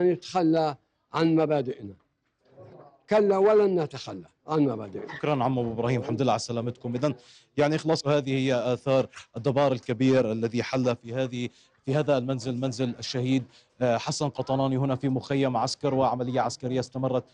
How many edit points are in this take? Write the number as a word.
one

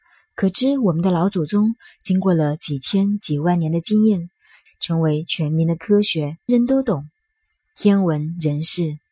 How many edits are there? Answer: two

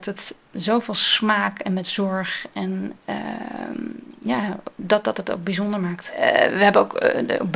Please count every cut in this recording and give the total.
zero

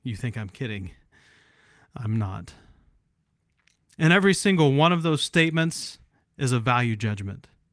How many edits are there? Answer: zero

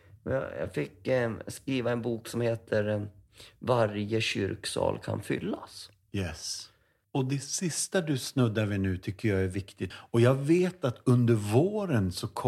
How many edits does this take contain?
two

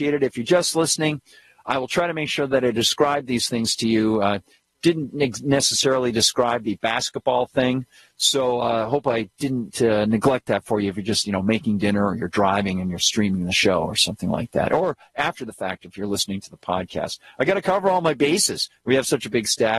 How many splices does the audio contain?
zero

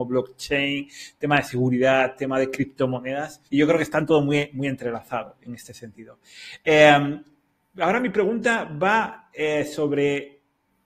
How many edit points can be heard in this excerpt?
one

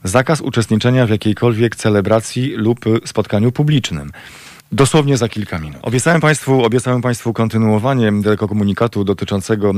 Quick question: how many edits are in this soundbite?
one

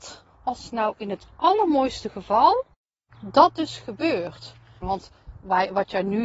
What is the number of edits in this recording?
one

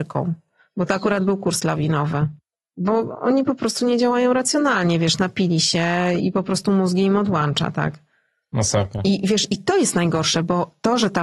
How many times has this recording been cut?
one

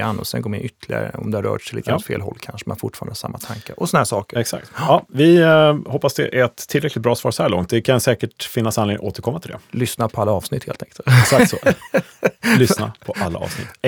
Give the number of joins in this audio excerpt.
zero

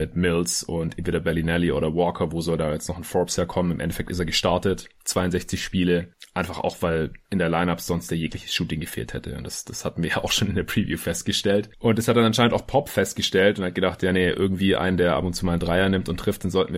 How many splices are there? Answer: zero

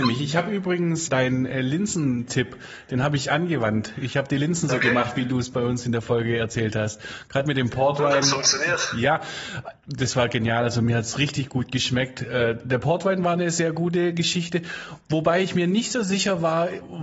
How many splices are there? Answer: one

